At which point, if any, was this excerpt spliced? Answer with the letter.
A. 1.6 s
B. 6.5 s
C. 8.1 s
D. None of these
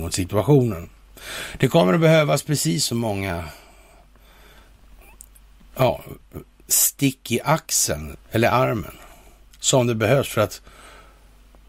C